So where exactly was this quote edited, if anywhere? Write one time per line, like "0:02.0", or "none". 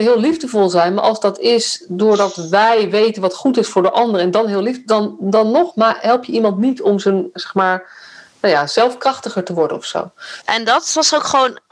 0:10.4